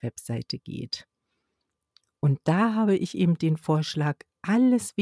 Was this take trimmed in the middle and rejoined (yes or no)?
no